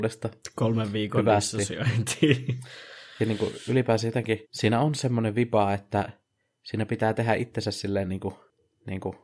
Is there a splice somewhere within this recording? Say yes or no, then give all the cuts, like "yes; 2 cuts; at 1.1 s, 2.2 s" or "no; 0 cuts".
yes; 1 cut; at 4.4 s